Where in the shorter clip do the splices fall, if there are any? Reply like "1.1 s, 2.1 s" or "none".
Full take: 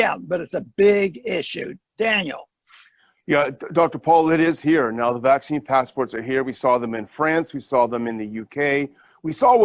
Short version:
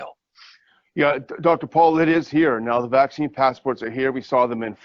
none